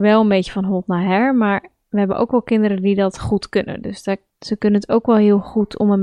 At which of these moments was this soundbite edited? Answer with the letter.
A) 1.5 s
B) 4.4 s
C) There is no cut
B